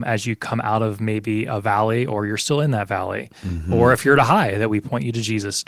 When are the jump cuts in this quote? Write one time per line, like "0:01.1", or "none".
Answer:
none

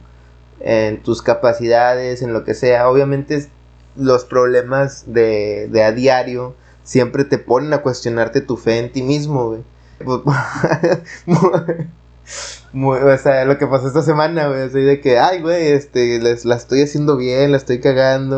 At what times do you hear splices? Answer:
0:10.0

